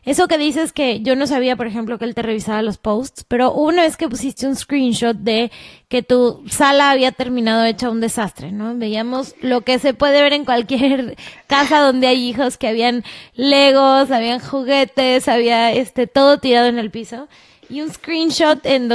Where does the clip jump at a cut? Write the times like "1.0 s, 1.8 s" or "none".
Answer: none